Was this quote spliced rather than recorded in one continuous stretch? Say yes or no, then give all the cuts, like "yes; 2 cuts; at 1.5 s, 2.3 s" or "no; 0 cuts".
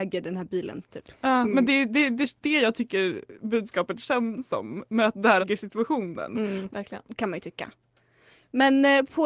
yes; 3 cuts; at 2.4 s, 5.4 s, 6.7 s